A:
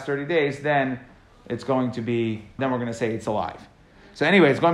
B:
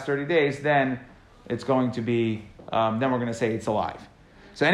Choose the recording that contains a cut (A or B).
A